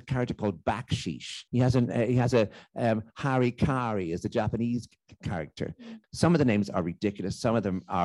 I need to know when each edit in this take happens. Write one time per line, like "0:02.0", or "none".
0:01.5
0:06.0